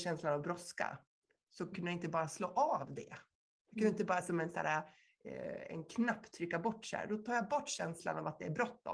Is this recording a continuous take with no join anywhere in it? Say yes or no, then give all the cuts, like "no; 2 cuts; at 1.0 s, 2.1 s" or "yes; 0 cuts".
yes; 0 cuts